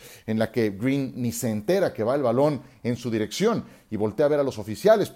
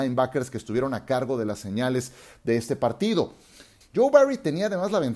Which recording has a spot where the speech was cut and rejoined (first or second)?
second